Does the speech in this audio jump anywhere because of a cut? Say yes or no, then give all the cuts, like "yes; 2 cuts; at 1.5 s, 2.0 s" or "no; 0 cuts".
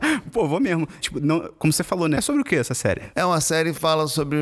yes; 2 cuts; at 1.0 s, 2.2 s